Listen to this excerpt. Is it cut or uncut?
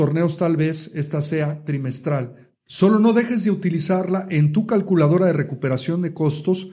cut